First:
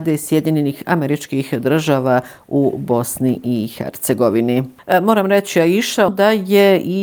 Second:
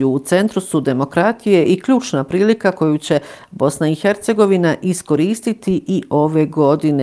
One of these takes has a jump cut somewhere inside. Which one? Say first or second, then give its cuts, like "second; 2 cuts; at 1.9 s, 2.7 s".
first; 1 cut; at 6.1 s